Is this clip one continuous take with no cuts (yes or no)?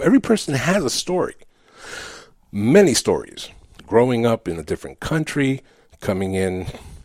yes